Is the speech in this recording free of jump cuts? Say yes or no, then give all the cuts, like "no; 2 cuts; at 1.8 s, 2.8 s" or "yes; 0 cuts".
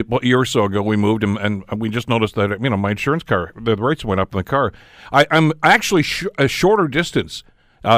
yes; 0 cuts